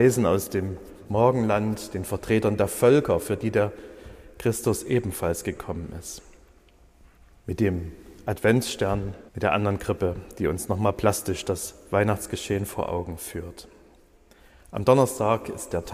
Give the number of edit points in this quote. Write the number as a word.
one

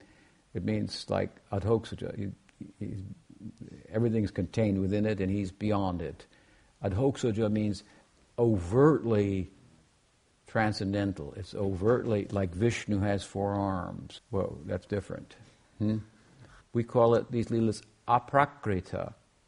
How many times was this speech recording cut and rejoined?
two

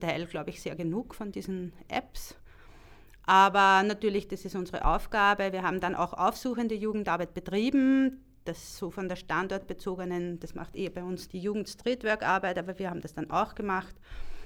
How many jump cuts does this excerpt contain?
one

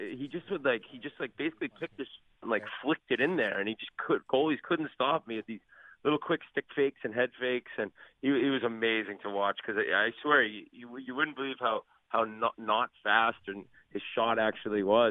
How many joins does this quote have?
zero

